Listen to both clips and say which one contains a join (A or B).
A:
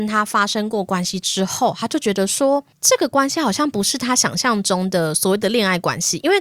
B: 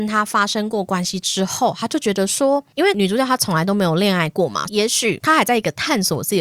B